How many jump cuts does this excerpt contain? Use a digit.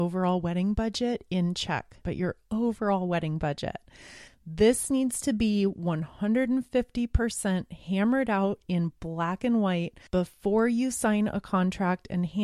3